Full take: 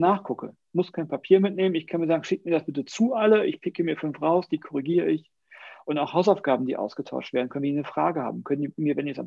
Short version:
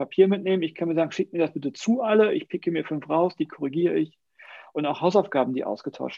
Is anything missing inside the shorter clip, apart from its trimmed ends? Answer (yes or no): no